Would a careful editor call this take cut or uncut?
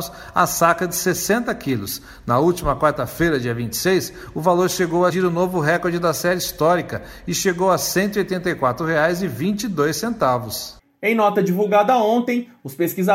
cut